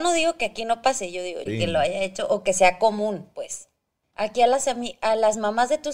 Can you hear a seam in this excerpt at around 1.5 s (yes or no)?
yes